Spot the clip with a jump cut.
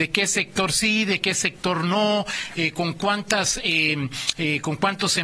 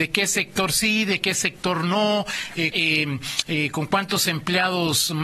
second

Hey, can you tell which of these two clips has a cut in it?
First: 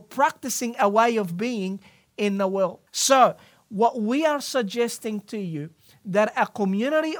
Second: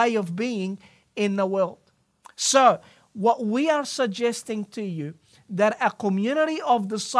first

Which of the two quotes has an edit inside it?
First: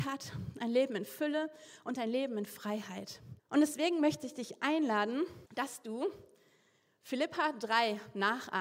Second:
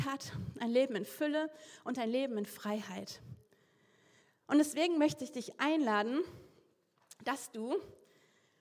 first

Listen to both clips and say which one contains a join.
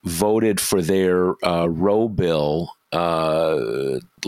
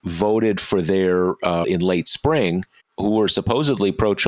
second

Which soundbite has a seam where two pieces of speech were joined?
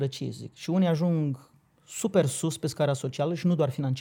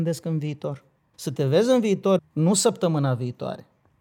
second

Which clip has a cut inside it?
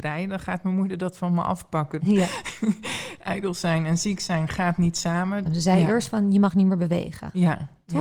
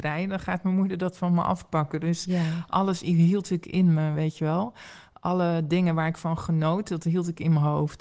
first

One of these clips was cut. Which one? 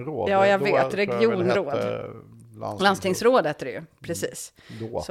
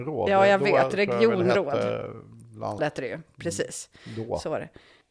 second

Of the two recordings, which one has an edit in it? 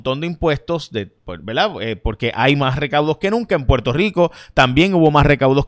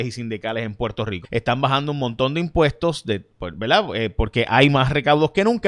second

